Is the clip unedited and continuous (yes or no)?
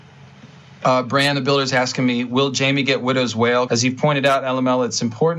no